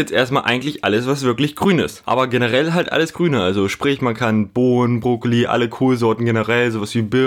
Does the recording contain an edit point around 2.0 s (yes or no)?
yes